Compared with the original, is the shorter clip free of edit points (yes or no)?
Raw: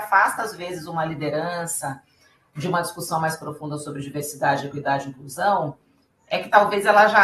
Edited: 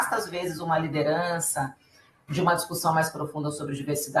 yes